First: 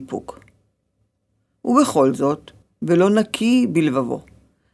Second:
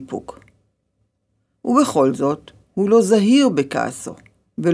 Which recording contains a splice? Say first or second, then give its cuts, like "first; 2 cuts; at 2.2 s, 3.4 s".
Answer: first; 1 cut; at 2.6 s